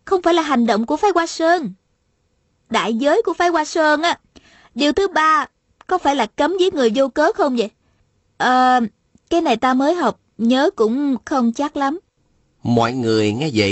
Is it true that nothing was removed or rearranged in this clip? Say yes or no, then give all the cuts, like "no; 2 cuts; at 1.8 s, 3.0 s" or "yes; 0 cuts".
yes; 0 cuts